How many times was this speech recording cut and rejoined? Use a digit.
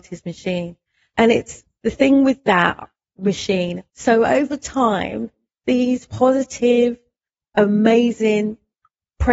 1